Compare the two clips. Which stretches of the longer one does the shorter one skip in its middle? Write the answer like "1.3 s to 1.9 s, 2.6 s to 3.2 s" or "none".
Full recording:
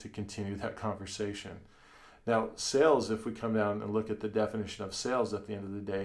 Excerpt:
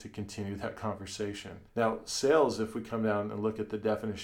1.7 s to 2.2 s